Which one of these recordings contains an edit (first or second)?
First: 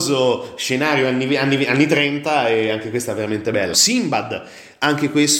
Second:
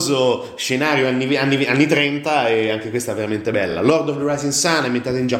first